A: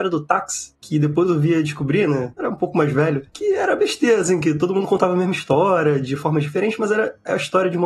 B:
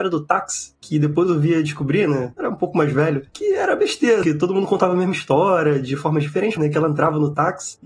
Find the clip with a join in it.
B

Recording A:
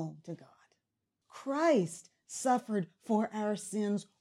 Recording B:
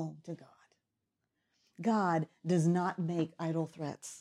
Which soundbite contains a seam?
A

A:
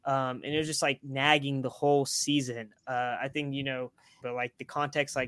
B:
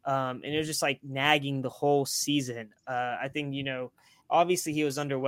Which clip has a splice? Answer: A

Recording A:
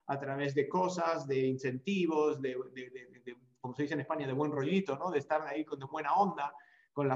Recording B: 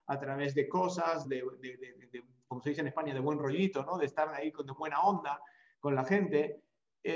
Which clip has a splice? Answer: B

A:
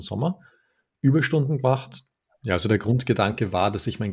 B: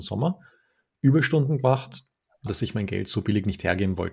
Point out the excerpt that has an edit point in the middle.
B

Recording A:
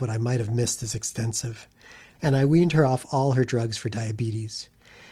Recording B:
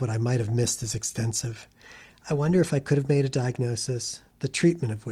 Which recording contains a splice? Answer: A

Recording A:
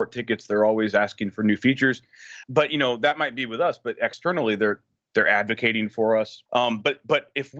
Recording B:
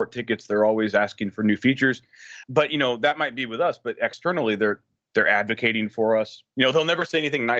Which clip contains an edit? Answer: A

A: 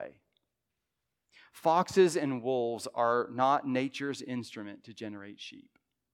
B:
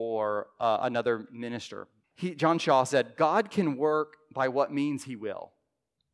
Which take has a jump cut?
B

